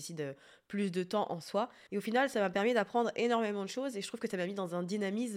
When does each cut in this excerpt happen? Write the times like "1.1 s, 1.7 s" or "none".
1.9 s